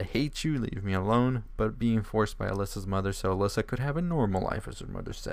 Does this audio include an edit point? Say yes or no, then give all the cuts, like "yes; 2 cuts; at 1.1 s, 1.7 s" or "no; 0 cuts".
no; 0 cuts